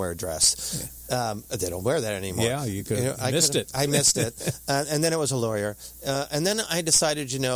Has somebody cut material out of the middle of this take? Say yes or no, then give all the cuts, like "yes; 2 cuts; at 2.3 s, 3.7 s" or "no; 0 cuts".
no; 0 cuts